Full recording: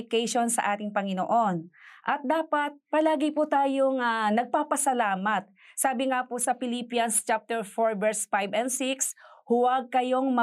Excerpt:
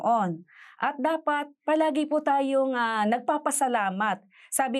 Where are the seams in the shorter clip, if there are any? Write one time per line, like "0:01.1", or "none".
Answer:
none